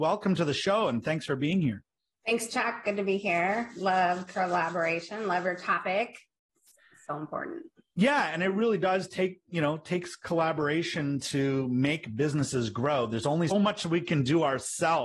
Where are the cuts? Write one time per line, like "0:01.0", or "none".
0:13.5

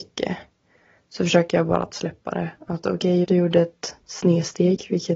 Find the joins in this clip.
0:03.2

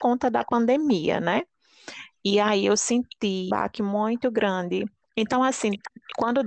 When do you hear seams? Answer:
0:03.5
0:05.0

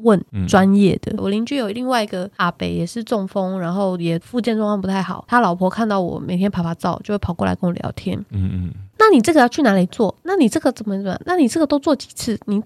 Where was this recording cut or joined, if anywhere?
none

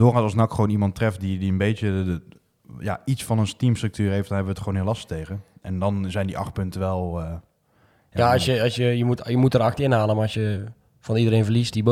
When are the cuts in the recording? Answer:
none

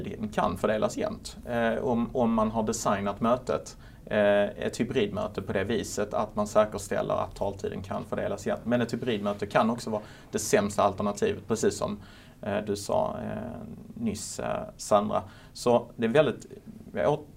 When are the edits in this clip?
none

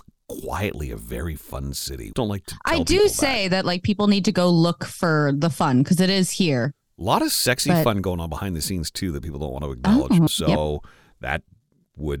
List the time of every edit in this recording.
0:02.1
0:10.3

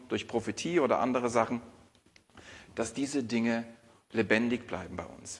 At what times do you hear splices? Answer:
none

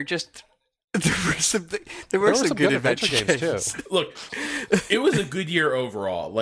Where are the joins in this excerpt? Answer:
none

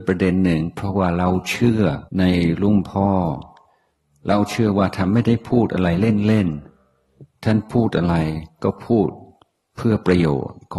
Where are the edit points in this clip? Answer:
0:02.1

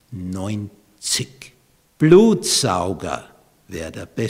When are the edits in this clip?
0:01.8

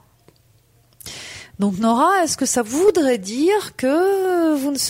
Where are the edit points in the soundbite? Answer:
none

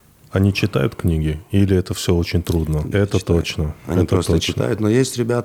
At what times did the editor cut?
0:02.9

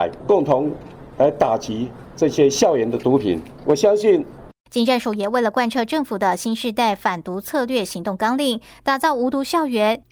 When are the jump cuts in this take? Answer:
0:04.5

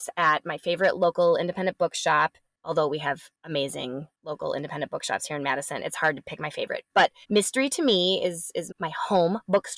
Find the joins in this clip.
0:07.2
0:08.7

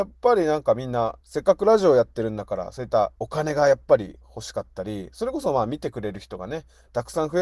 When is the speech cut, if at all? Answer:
0:01.2
0:03.1

